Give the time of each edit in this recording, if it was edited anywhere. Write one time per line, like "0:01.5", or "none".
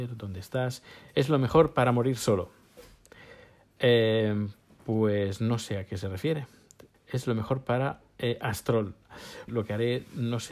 0:06.9
0:09.5